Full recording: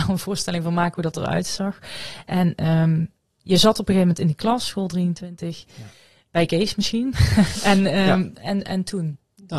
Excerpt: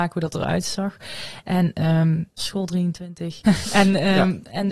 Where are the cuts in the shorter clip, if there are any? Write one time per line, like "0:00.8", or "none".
0:02.4
0:03.4